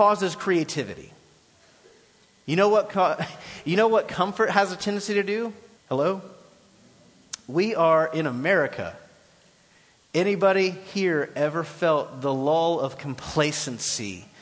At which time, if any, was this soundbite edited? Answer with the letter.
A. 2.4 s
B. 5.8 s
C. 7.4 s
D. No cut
B